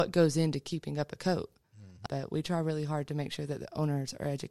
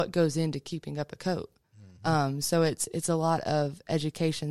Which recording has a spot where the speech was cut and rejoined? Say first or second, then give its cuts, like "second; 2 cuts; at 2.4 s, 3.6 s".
first; 1 cut; at 2.1 s